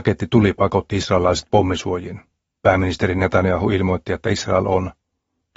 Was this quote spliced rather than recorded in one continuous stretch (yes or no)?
no